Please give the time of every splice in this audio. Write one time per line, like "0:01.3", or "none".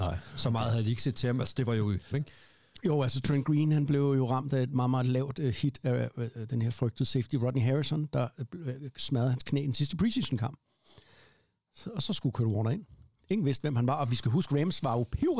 0:02.1